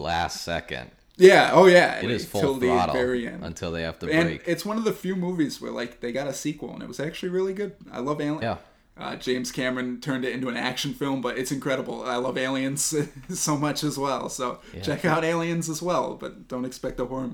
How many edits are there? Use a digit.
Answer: 2